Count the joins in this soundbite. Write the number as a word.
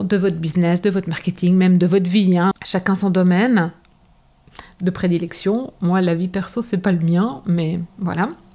one